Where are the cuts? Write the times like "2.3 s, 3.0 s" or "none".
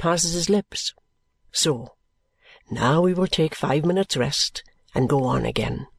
1.5 s, 5.1 s